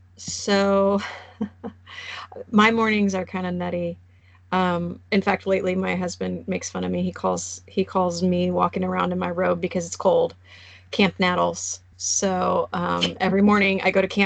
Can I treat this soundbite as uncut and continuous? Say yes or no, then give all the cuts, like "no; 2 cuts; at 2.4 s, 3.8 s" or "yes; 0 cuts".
yes; 0 cuts